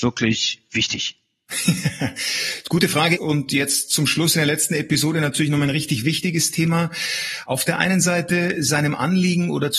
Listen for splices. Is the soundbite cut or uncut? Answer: cut